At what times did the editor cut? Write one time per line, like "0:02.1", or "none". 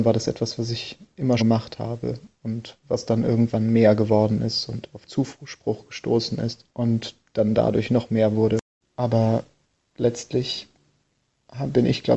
0:01.4
0:06.7
0:08.8